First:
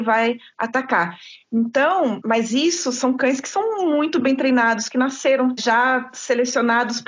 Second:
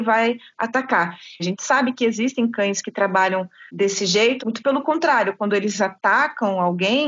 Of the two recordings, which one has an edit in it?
second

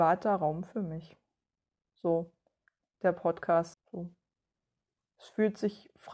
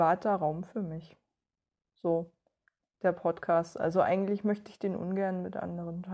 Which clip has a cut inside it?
first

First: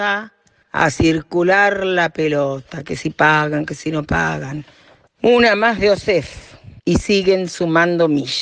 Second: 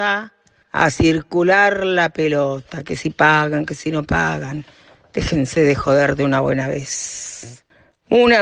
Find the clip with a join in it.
first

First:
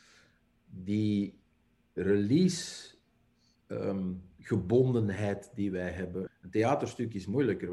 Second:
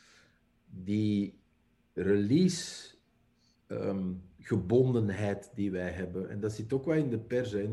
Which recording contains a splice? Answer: first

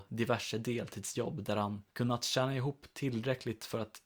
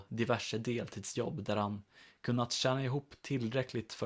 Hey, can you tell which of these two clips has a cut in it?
first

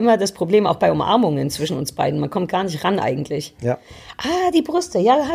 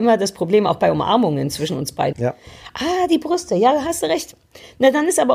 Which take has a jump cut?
second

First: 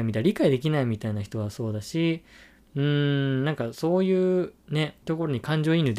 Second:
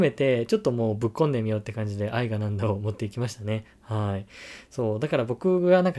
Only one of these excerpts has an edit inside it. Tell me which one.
first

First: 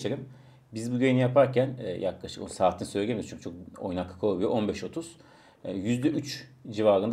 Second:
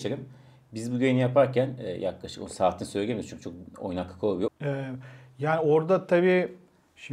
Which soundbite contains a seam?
second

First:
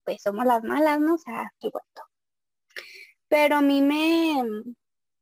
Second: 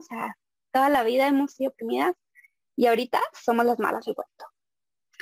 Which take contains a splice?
first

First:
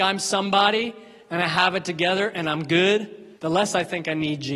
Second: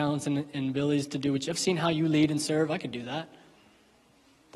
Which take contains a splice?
first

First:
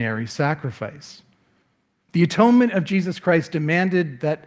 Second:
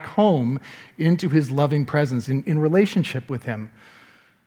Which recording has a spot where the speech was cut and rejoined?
first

